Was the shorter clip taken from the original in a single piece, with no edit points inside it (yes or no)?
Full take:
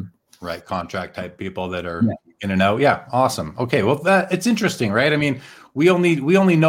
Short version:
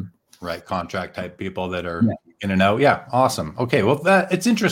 yes